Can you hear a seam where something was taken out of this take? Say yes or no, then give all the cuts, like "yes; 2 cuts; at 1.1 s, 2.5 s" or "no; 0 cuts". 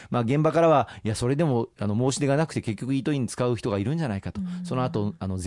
no; 0 cuts